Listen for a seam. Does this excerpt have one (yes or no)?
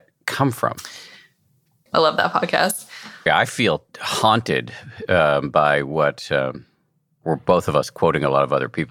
yes